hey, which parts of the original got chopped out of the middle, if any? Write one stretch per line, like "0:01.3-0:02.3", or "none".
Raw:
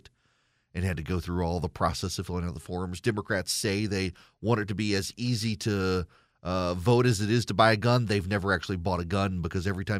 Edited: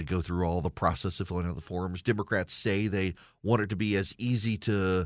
none